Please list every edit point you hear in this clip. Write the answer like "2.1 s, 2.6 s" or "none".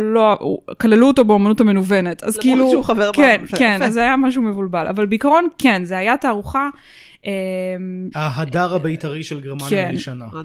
8.1 s